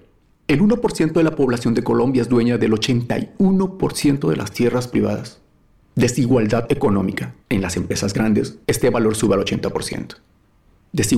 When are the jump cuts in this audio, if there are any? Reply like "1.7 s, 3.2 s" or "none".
5.8 s, 7.4 s, 8.6 s